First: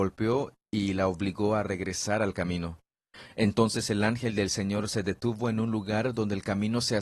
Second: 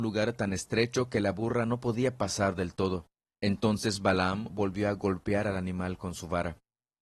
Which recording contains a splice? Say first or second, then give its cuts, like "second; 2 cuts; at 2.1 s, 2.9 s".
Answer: second; 2 cuts; at 3.3 s, 4.5 s